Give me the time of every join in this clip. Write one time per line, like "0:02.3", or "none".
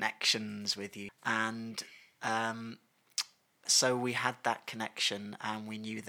0:01.1
0:03.7

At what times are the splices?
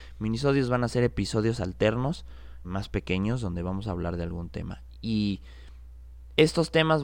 0:02.6

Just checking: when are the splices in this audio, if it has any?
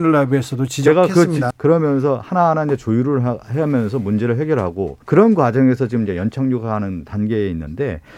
0:01.5
0:05.0

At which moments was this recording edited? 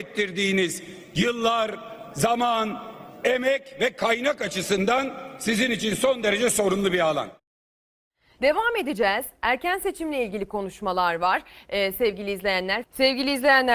0:08.4
0:12.8

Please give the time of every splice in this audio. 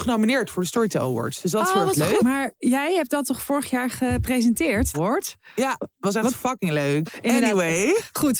0:02.2
0:04.9
0:07.0

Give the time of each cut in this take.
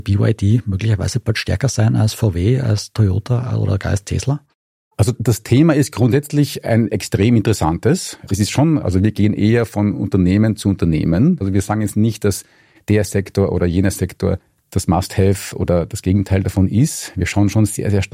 0:08.3

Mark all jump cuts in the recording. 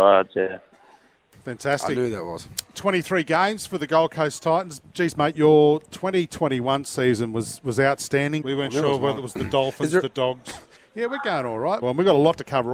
0:08.4
0:10.8
0:11.8

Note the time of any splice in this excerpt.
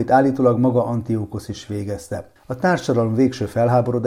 0:02.4

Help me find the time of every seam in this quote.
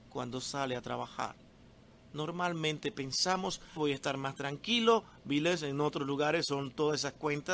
0:03.8

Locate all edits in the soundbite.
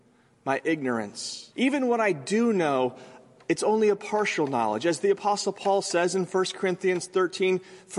0:01.5

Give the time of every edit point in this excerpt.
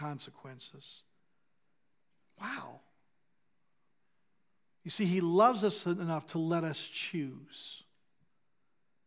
none

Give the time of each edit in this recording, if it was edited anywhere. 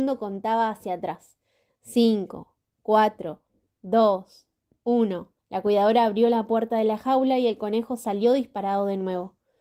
0:03.7
0:05.4

